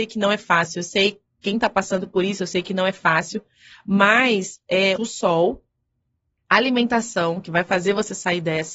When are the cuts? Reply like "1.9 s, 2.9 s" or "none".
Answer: 5.0 s